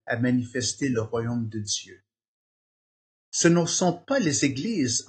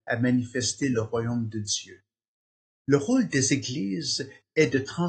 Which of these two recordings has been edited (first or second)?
second